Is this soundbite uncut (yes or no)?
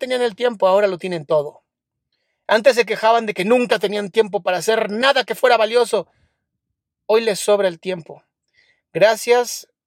yes